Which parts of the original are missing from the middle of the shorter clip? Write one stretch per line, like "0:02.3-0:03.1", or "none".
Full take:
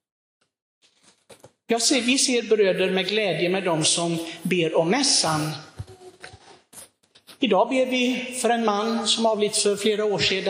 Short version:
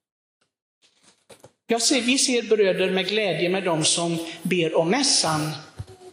none